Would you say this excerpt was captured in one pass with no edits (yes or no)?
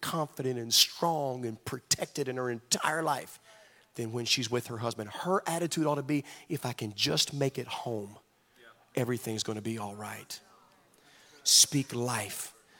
yes